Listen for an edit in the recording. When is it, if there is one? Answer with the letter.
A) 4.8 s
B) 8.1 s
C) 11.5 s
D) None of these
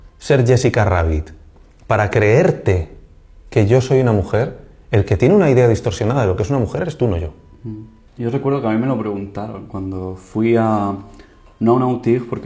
B